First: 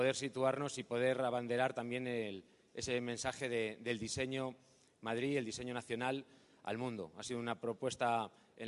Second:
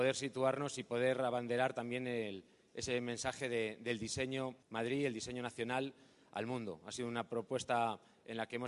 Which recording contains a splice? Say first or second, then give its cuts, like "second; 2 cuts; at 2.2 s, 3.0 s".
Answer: second; 1 cut; at 4.6 s